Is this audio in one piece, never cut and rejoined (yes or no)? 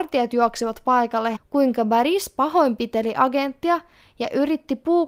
no